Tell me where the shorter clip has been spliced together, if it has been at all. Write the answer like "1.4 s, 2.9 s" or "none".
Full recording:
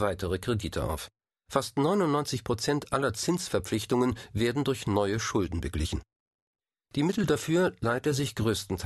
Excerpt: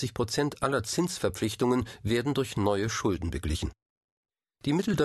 none

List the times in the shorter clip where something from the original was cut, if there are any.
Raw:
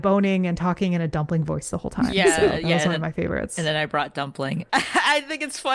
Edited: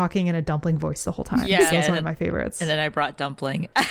1.7 s

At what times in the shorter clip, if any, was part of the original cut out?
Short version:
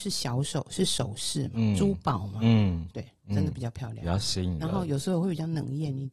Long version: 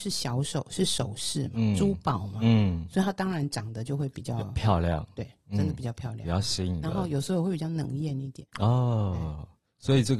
2.9 s

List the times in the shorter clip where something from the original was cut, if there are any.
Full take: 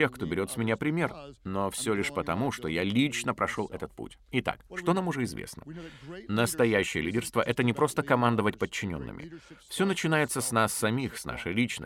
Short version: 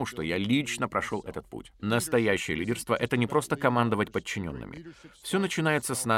1.8 s

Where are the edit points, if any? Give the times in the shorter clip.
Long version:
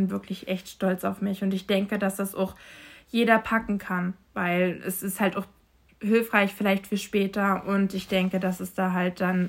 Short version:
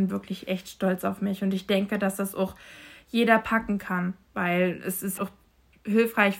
5.2 s

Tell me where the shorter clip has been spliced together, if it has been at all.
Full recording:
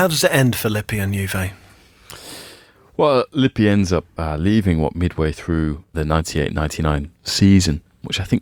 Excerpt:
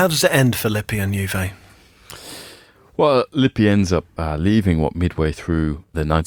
none

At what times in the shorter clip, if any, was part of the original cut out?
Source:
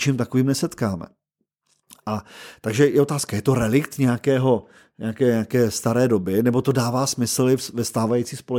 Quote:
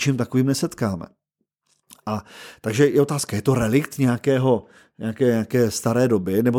none

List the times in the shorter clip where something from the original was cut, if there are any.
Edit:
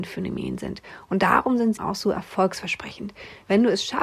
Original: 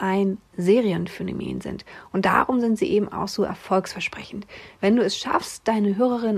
1.8 s

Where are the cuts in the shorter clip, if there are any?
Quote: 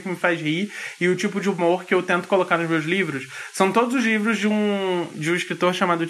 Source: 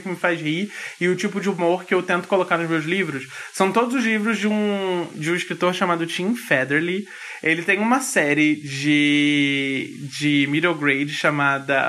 none

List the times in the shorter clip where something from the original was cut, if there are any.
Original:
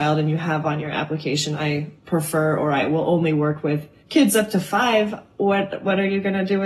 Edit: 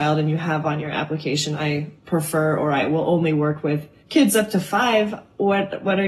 none

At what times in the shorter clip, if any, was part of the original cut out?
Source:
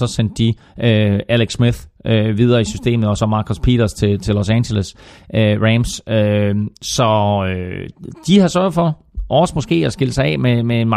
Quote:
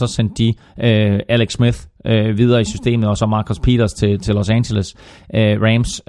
none

